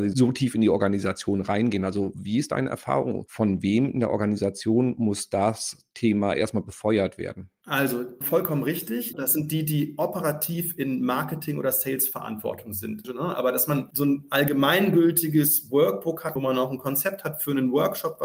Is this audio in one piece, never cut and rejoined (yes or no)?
no